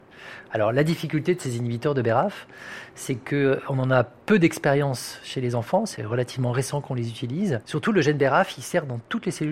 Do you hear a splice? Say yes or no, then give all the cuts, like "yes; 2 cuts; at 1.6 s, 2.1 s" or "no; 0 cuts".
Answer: no; 0 cuts